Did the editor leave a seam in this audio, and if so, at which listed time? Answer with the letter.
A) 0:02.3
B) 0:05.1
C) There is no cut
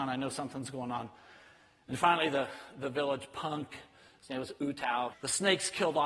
B